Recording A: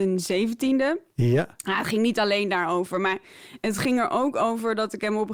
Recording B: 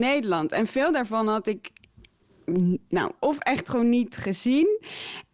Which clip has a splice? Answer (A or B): B